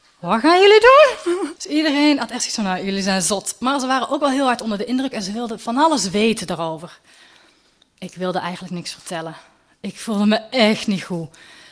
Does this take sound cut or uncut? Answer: cut